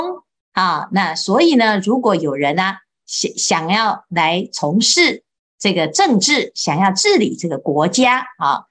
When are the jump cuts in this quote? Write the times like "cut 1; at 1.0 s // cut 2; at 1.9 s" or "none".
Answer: none